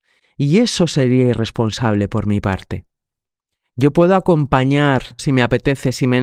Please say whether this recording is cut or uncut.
cut